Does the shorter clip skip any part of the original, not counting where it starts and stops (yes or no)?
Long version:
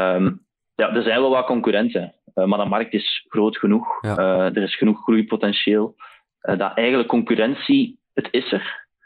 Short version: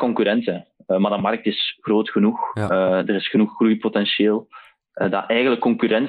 no